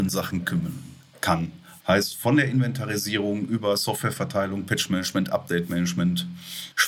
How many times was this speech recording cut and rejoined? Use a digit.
1